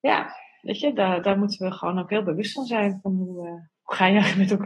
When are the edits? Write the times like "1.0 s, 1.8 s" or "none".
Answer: 1.2 s